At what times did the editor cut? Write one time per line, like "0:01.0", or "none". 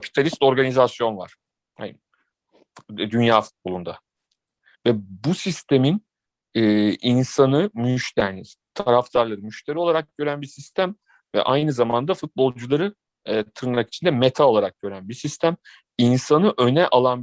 0:04.7